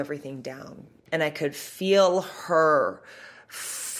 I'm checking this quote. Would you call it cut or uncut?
cut